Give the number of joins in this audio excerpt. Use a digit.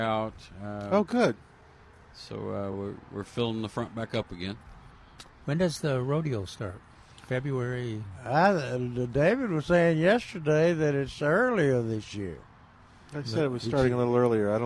0